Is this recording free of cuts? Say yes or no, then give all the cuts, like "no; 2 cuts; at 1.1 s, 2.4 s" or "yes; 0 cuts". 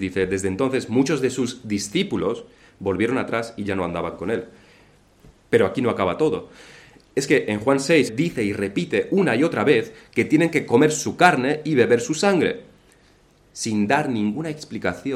no; 2 cuts; at 5.3 s, 8.1 s